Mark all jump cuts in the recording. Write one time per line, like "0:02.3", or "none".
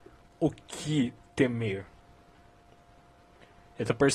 none